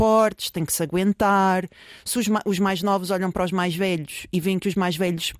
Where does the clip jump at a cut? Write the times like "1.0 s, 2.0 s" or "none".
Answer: none